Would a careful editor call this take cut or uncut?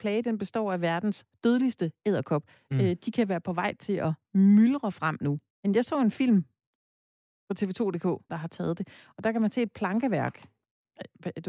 cut